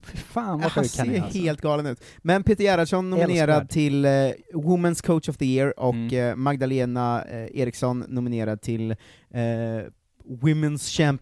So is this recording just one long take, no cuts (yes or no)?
yes